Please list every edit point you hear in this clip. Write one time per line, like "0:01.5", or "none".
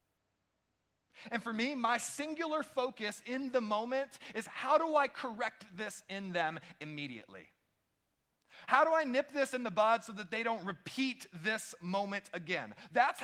none